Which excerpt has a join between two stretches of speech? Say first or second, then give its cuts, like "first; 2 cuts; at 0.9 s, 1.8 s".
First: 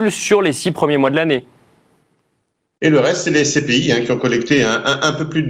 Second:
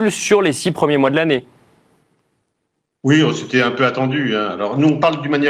first; 1 cut; at 2.8 s